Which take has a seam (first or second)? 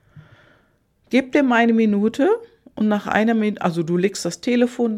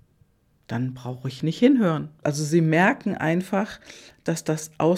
second